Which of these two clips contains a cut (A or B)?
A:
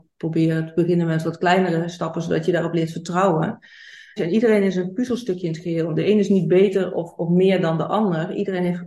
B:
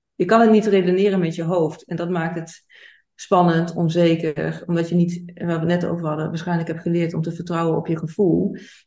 A